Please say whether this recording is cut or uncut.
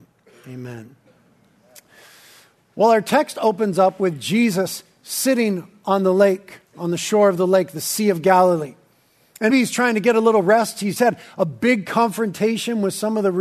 cut